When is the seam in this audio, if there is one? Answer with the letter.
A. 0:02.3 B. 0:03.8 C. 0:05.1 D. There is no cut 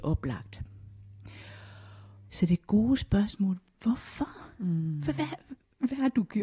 A